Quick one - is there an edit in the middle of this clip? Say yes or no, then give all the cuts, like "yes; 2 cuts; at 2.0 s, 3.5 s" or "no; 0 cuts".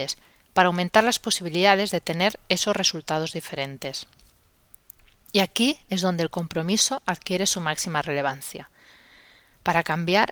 no; 0 cuts